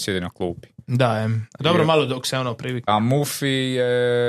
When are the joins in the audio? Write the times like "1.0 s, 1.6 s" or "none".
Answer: 2.9 s

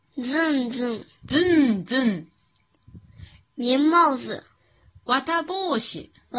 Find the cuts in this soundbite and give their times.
3.4 s

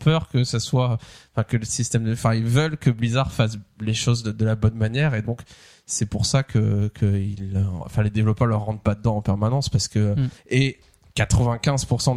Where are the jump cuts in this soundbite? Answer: 7.8 s, 10.4 s

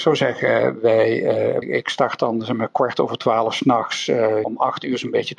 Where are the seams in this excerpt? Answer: 1.6 s, 4.4 s

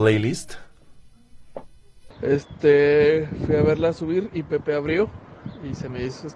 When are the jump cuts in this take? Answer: 2.1 s

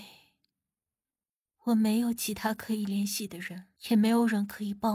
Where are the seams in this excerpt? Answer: 3.8 s

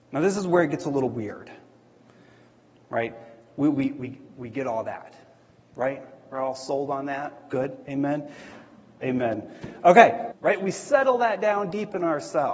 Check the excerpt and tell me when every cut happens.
9.0 s, 10.3 s

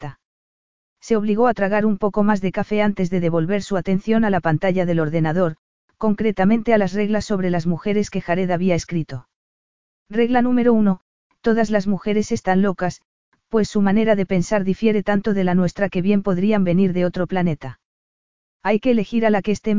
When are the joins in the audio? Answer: none

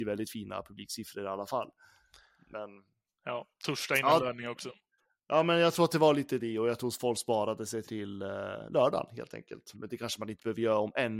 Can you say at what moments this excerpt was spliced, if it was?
7.8 s, 9.7 s

